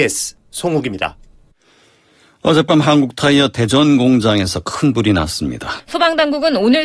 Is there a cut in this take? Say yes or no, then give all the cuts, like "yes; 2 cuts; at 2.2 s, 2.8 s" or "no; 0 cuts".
yes; 1 cut; at 5.8 s